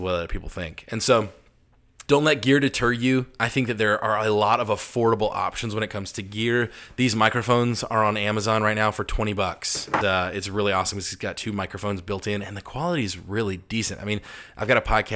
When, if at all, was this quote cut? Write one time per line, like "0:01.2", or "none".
0:02.1
0:10.0